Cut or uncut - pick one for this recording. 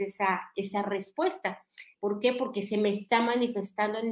cut